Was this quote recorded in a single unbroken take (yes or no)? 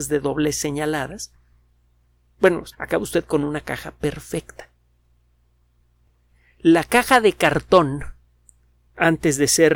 no